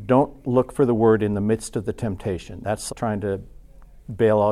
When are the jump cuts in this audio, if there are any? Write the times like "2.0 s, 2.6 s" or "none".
2.9 s

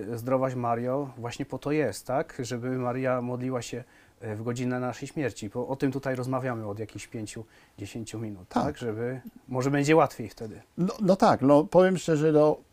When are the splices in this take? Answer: none

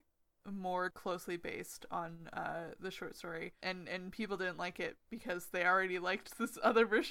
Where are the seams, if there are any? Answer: none

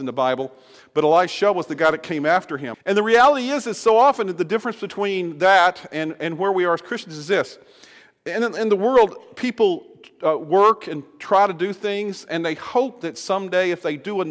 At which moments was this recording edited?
2.7 s

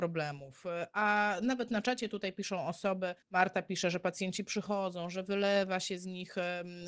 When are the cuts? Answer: 3.2 s

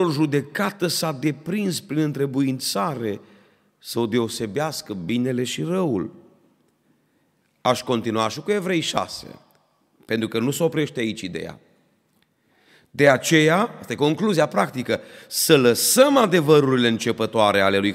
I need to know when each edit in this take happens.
none

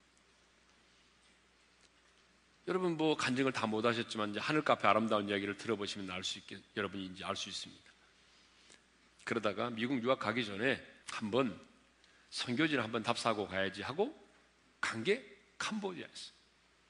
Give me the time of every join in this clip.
9.1 s, 11.0 s

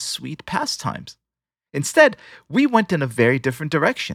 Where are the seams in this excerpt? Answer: none

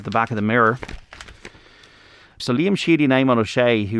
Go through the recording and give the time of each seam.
2.4 s

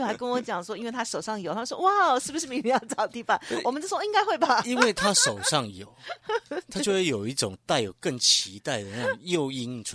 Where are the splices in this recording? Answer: none

